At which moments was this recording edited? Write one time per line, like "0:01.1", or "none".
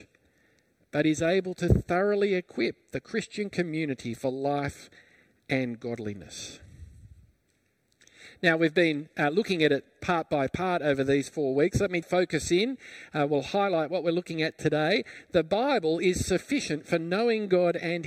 0:12.0